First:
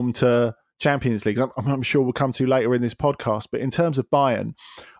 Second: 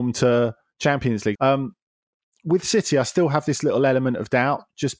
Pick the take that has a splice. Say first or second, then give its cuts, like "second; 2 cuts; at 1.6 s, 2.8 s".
second; 1 cut; at 1.3 s